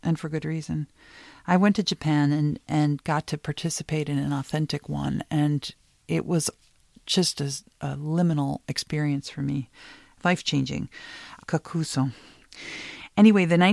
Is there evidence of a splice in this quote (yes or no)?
yes